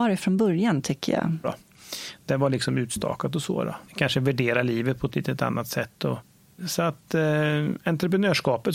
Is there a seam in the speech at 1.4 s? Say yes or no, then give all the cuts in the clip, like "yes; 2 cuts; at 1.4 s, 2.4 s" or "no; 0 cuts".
yes; 2 cuts; at 1.4 s, 3.9 s